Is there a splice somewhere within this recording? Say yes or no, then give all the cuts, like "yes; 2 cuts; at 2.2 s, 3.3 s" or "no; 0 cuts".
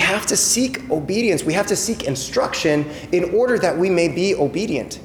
no; 0 cuts